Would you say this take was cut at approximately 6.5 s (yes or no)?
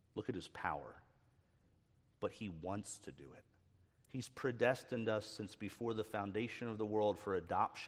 no